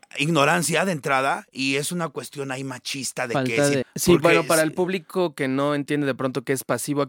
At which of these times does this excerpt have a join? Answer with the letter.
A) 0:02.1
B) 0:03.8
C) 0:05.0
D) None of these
B